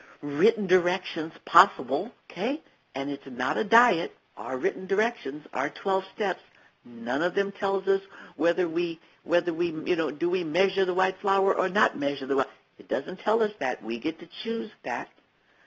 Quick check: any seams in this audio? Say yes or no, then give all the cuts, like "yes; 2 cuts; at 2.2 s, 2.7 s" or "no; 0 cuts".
yes; 2 cuts; at 2.2 s, 4.3 s